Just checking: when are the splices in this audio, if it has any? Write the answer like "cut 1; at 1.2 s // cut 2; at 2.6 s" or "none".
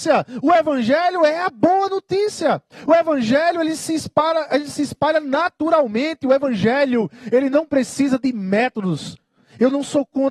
none